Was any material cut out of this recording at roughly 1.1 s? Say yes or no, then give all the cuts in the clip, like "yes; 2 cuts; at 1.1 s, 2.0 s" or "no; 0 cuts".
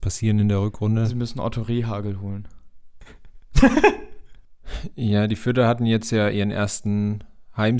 no; 1 cut; at 3.0 s